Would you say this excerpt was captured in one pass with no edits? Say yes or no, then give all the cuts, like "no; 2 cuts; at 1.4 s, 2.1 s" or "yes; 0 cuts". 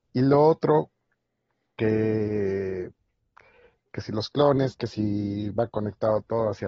yes; 0 cuts